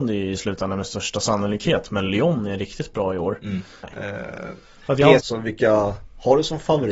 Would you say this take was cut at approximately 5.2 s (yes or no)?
yes